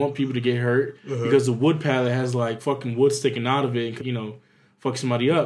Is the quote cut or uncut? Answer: cut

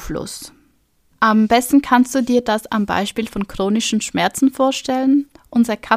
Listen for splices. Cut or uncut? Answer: cut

